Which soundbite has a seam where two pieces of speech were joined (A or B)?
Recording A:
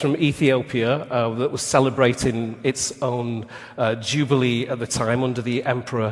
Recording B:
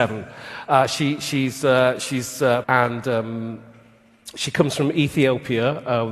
B